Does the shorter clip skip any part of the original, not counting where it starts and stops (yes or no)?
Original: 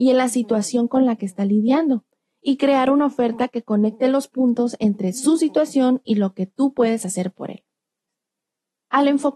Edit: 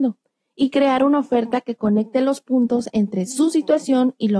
no